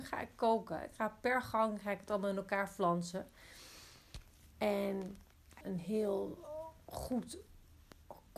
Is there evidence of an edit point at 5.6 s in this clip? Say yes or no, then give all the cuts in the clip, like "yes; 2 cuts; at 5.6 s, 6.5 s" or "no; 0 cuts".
yes; 1 cut; at 5.6 s